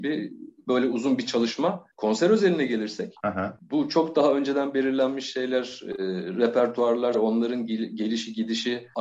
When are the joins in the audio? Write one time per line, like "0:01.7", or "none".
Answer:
0:07.1